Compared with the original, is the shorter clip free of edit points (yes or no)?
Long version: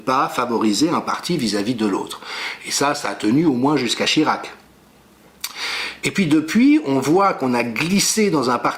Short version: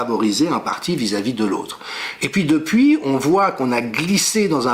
no